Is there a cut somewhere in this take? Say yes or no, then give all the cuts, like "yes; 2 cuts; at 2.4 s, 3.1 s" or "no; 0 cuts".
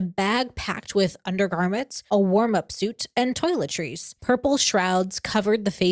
yes; 1 cut; at 4.2 s